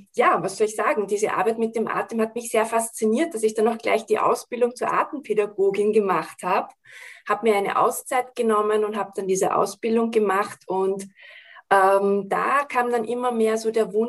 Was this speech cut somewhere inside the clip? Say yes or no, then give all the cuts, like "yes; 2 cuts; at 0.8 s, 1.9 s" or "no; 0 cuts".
no; 0 cuts